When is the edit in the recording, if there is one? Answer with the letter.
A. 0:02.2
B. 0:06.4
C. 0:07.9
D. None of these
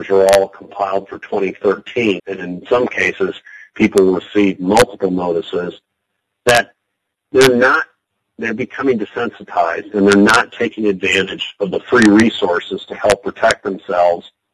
A